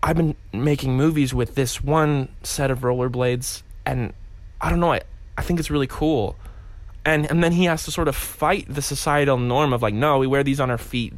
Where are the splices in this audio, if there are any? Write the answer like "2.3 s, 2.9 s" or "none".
none